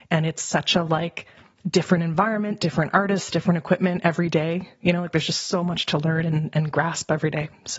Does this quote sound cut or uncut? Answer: uncut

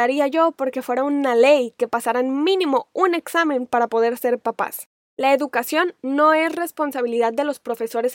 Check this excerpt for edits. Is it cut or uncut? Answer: uncut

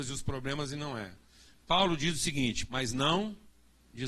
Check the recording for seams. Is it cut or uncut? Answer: cut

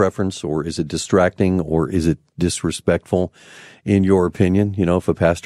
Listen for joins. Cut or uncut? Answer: uncut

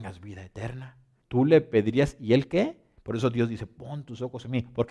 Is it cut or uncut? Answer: cut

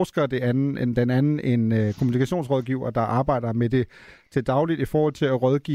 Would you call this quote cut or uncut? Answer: uncut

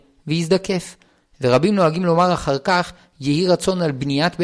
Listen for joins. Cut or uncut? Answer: uncut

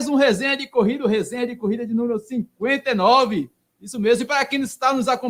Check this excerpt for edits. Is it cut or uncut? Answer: uncut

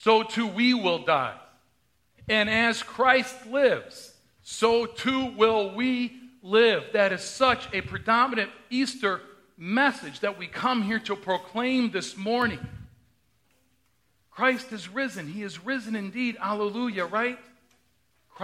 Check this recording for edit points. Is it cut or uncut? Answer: uncut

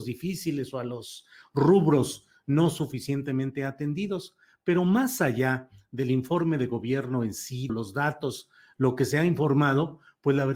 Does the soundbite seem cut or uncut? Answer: cut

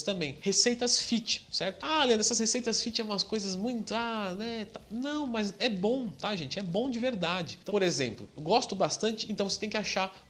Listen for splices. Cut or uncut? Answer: cut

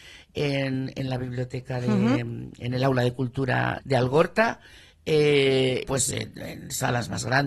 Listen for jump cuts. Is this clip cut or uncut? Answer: cut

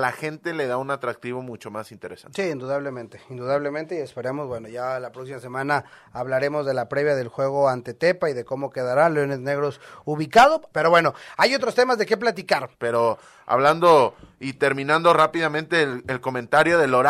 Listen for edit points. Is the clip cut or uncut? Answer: cut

